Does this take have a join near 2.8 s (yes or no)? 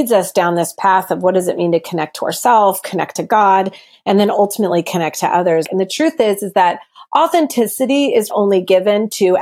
no